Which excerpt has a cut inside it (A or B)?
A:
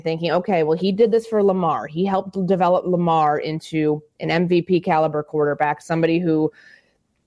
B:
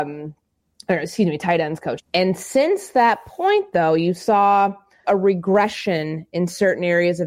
B